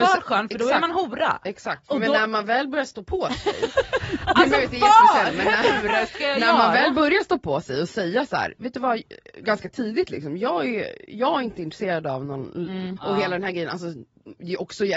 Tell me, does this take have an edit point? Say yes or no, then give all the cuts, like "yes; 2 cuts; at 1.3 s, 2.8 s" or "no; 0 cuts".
yes; 1 cut; at 13.0 s